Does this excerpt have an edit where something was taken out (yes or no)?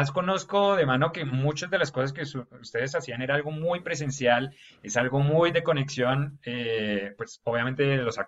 no